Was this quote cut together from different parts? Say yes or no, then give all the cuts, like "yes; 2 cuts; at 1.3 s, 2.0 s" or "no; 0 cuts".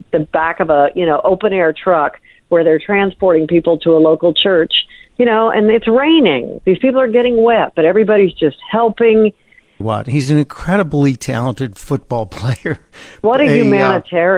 yes; 2 cuts; at 9.8 s, 13.2 s